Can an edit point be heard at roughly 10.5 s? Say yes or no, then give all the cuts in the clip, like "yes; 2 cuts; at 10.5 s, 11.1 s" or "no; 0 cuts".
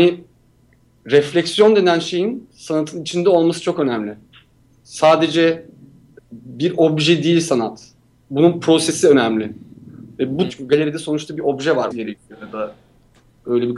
yes; 3 cuts; at 6.2 s, 10.5 s, 11.9 s